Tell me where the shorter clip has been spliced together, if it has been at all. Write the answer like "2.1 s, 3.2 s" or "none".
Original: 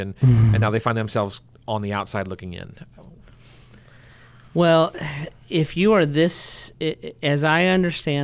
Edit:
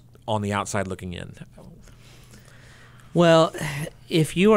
none